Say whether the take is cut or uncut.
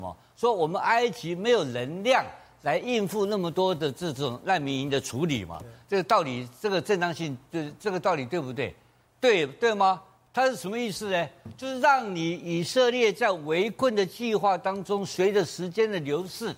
cut